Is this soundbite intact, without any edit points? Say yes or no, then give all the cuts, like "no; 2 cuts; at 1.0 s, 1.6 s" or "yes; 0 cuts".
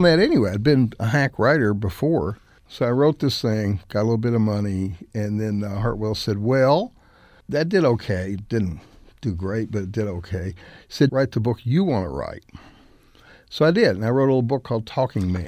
no; 1 cut; at 11.1 s